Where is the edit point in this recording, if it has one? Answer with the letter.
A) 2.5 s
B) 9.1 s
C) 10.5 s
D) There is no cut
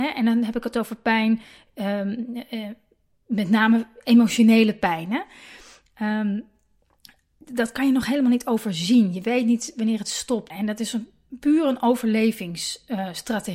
C